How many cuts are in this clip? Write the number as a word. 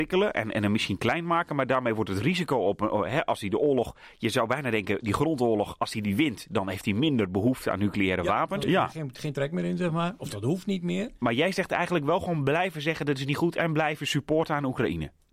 one